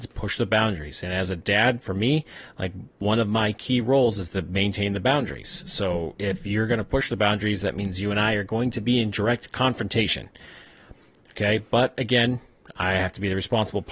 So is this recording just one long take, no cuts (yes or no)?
yes